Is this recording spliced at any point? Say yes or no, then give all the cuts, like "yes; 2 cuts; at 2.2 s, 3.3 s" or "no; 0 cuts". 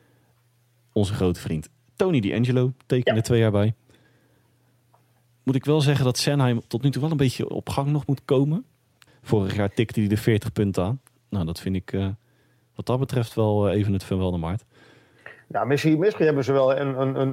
yes; 1 cut; at 9.1 s